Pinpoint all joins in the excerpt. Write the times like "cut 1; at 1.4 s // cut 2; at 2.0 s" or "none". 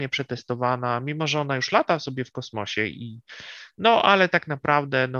none